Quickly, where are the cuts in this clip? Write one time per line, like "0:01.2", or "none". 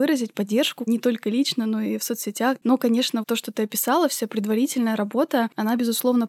0:03.2